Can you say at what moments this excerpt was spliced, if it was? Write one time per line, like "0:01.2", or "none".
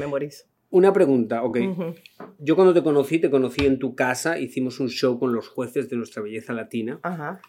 none